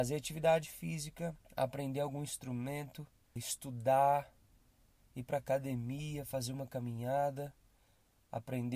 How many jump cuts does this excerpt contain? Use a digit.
2